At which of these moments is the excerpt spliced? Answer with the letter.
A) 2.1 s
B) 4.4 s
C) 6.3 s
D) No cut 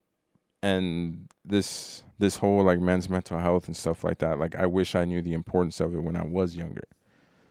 A